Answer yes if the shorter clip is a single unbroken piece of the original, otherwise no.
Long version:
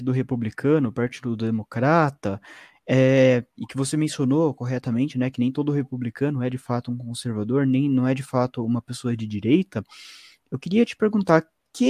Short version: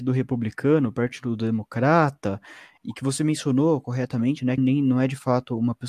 no